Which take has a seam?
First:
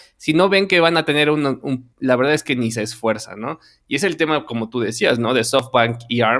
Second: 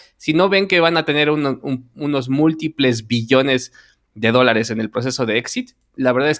first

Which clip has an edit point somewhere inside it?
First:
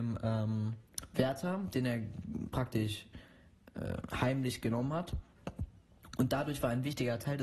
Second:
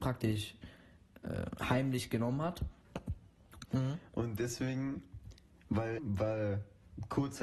second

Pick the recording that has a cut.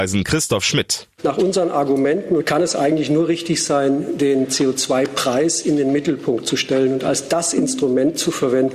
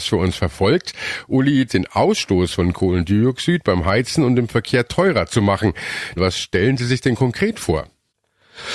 second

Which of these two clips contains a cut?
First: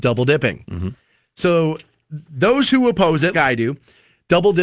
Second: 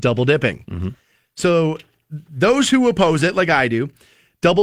first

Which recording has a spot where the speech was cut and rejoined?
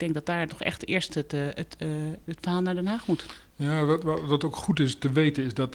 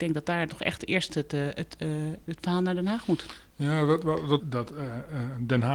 second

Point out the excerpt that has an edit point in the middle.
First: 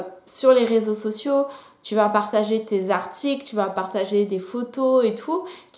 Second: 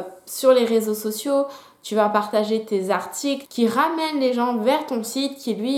second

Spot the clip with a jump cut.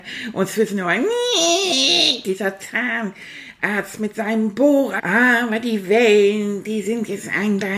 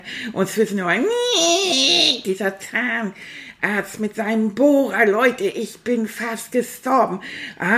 first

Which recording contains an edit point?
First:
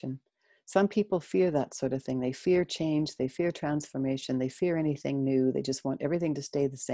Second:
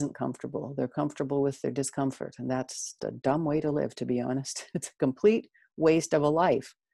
second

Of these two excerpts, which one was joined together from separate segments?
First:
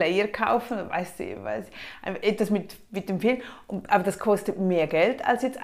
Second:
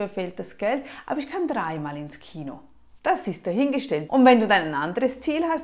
second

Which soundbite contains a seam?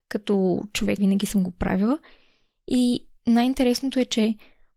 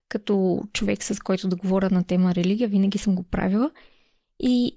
first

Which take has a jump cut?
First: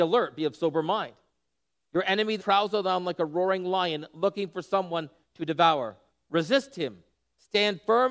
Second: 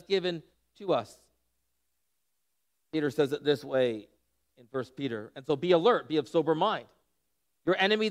first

